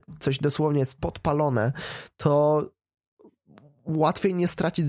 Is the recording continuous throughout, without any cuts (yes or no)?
yes